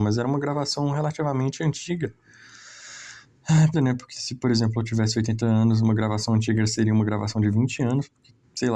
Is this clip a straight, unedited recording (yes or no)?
no